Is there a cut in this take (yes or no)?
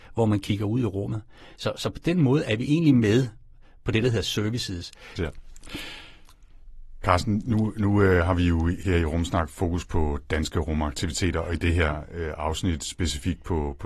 yes